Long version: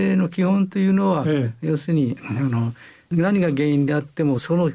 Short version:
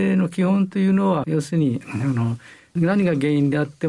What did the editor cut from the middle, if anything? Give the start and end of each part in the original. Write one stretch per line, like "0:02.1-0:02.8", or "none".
0:01.2-0:01.6